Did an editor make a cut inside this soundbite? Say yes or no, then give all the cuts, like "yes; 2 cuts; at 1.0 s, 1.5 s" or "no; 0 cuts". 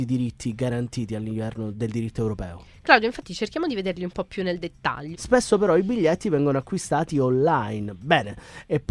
yes; 2 cuts; at 1.7 s, 5.1 s